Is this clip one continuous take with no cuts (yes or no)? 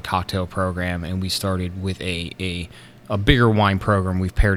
yes